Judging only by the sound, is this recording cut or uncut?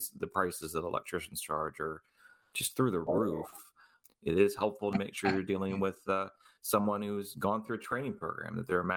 cut